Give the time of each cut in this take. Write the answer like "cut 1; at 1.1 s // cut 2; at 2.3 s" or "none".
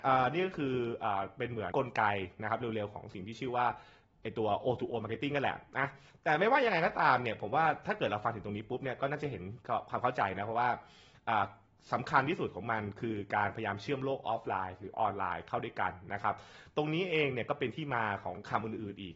cut 1; at 1.7 s